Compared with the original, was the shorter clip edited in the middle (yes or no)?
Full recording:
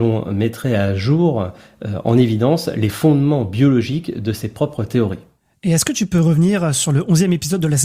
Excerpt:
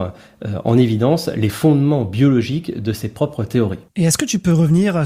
yes